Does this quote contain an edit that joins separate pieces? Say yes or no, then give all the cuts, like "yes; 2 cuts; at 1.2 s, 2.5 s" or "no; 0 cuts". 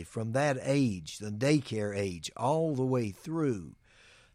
no; 0 cuts